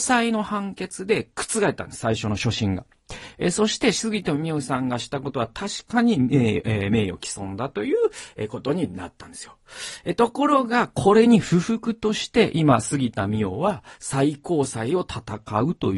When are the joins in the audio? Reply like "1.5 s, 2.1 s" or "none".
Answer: none